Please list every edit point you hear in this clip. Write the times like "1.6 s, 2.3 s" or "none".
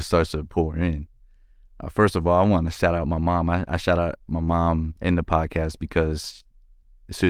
none